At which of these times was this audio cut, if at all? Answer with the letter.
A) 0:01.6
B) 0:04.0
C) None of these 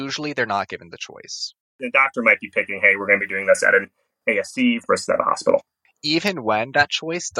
A